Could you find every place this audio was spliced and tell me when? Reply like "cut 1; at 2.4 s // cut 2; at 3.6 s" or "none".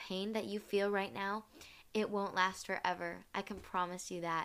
none